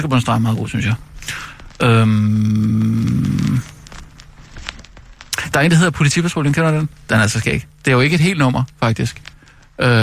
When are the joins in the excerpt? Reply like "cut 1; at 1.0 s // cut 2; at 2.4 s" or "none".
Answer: none